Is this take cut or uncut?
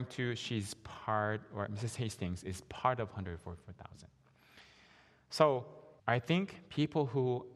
cut